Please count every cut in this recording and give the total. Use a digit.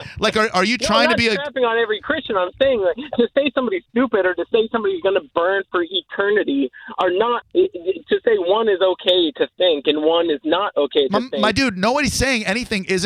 1